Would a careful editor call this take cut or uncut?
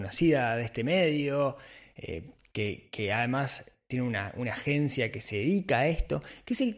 uncut